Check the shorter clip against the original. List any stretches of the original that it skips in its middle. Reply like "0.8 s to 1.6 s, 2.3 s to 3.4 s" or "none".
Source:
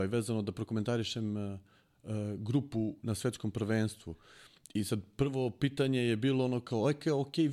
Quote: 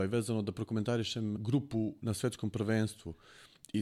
1.4 s to 2.4 s